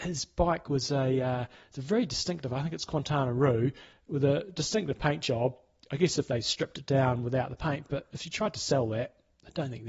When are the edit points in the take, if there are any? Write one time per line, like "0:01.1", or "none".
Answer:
none